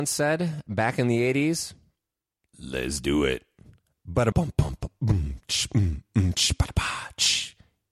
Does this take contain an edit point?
yes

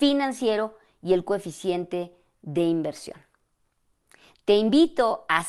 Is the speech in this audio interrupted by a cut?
no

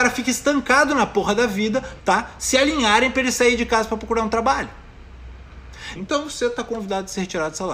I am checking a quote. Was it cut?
yes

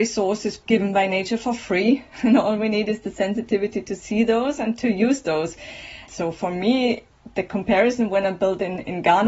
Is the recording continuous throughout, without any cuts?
no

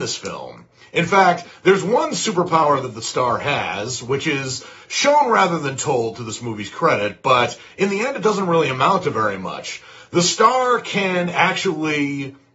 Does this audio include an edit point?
no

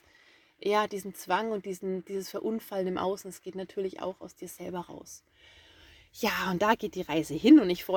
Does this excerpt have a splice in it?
no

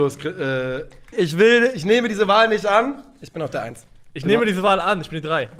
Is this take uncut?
no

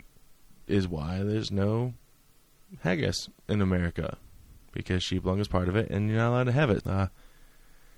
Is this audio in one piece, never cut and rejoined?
no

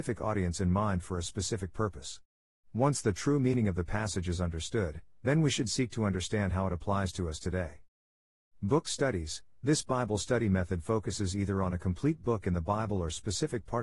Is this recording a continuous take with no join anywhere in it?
yes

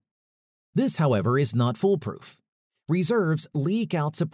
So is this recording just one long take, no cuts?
yes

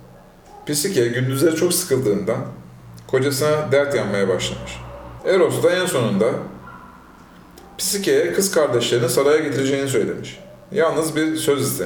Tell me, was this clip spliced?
yes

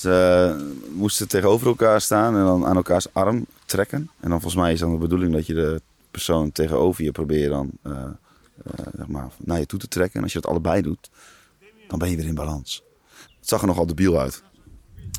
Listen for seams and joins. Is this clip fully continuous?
no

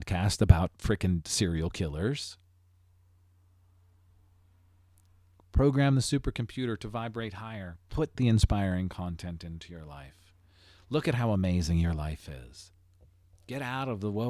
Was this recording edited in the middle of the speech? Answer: no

